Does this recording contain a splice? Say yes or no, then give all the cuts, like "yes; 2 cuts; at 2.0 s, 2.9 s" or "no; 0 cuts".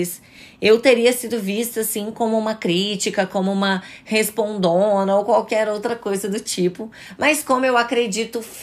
no; 0 cuts